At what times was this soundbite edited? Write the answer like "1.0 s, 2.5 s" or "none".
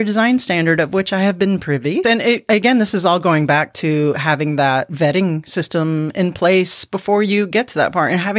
2.0 s